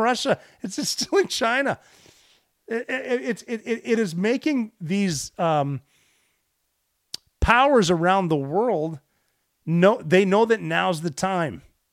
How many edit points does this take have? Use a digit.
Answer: 0